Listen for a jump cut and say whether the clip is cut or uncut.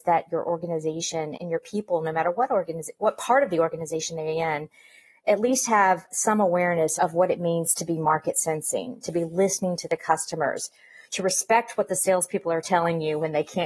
cut